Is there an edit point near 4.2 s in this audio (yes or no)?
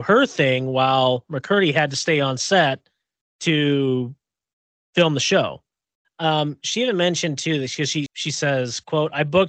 no